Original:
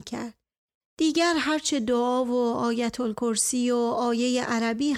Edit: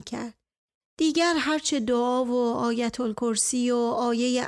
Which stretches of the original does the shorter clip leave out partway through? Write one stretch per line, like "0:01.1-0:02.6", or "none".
none